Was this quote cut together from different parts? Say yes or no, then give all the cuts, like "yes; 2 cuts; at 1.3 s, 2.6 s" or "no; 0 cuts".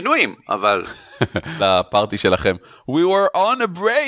yes; 1 cut; at 1.6 s